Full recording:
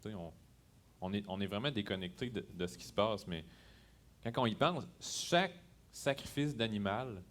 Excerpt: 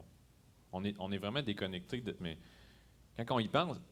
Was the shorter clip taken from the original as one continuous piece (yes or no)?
no